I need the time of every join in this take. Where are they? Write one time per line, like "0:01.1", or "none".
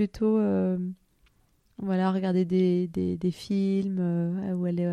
none